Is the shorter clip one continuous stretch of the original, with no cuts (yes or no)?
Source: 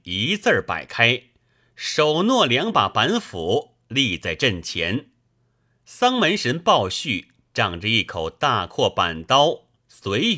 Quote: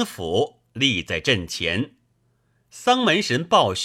yes